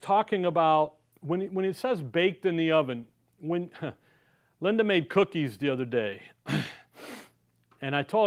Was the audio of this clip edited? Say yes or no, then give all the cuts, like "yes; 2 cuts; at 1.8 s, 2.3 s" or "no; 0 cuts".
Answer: no; 0 cuts